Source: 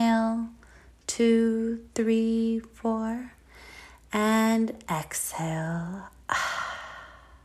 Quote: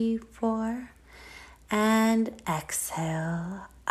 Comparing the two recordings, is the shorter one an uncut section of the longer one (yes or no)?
yes